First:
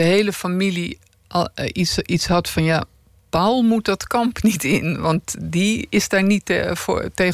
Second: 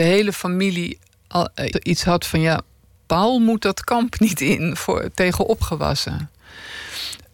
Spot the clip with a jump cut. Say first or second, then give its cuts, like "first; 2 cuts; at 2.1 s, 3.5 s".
second; 2 cuts; at 1.7 s, 4.7 s